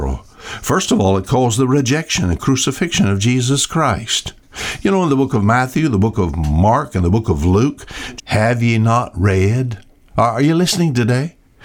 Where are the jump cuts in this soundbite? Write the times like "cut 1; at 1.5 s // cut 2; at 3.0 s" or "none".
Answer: cut 1; at 8.2 s